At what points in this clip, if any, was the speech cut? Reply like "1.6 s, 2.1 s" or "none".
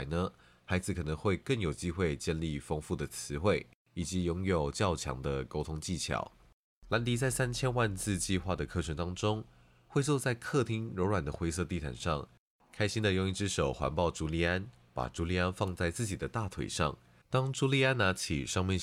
17.2 s